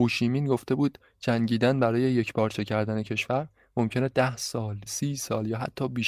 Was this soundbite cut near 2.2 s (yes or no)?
no